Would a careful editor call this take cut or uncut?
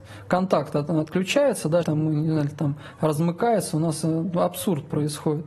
cut